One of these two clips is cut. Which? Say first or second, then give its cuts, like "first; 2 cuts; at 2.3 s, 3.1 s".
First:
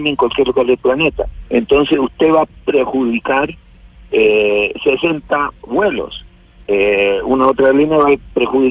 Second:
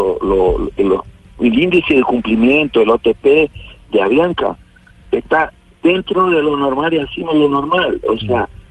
first; 1 cut; at 1.4 s